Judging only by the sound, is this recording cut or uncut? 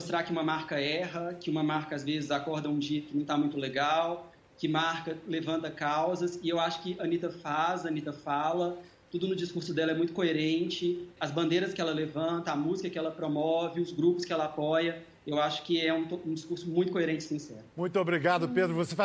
cut